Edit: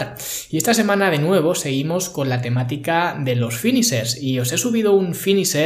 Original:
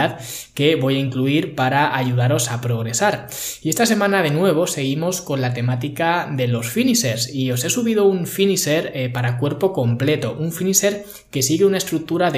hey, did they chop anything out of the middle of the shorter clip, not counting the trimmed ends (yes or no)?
no